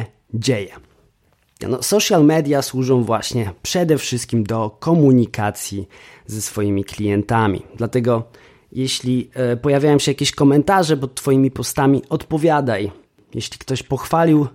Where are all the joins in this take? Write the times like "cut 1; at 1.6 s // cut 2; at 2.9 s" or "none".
cut 1; at 1.6 s